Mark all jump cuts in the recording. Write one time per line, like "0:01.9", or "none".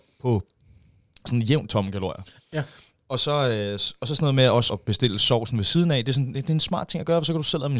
0:04.7